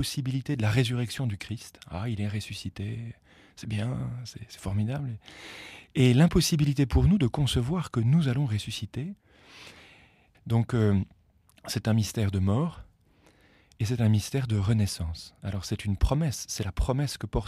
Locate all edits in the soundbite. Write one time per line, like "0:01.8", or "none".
0:10.3
0:15.4